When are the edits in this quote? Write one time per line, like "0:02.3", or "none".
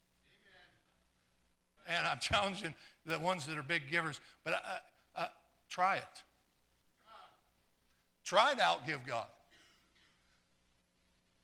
0:01.8